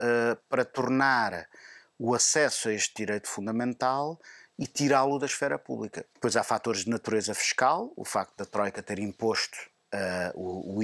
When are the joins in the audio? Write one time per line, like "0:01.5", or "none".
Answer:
0:06.1